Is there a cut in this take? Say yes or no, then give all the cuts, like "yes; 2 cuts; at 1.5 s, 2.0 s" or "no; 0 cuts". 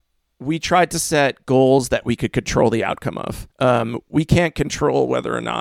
yes; 1 cut; at 3.5 s